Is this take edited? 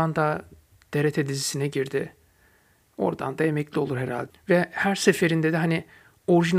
yes; 1 cut; at 4.3 s

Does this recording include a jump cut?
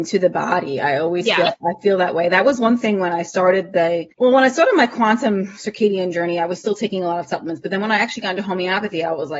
yes; 1 cut; at 4.1 s

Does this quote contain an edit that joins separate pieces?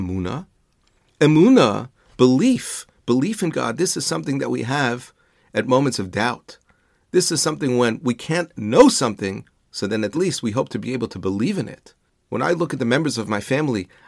yes; 1 cut; at 10.1 s

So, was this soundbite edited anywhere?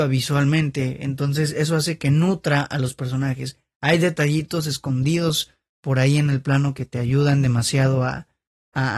no; 0 cuts

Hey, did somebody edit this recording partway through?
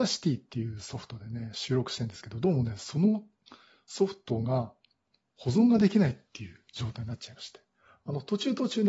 no; 0 cuts

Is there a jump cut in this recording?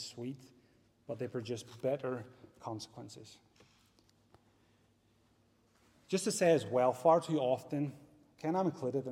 no; 0 cuts

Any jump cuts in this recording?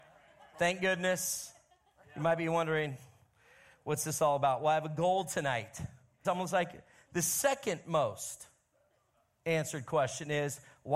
yes; 1 cut; at 6.2 s

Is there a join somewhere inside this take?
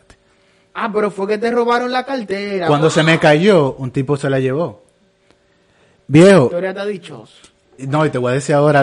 no; 0 cuts

